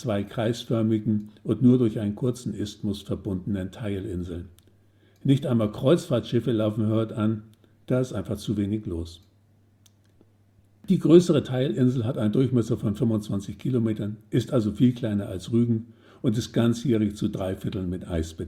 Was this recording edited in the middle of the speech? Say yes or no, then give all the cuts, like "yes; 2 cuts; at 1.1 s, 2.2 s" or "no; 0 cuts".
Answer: no; 0 cuts